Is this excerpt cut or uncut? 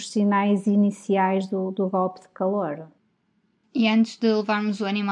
uncut